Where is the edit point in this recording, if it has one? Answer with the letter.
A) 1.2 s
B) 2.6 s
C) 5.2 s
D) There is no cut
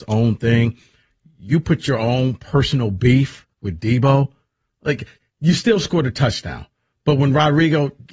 C